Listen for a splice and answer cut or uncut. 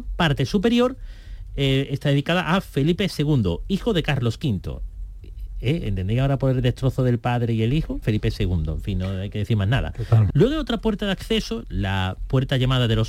cut